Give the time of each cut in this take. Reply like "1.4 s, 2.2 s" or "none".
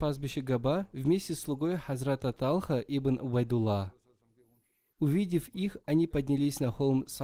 4.9 s